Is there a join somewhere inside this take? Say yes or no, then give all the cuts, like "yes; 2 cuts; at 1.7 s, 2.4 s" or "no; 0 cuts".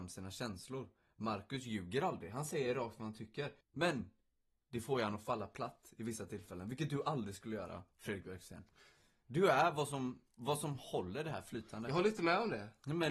yes; 1 cut; at 3.6 s